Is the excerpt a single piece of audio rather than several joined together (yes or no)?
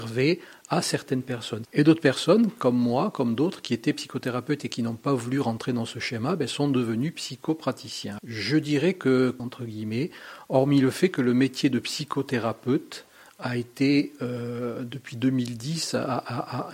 no